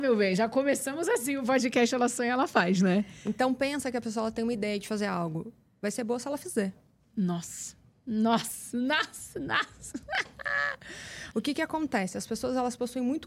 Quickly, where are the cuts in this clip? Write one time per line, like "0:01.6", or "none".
0:11.3